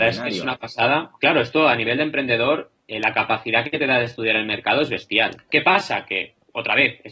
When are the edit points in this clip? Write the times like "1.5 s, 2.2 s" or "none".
2.8 s, 5.5 s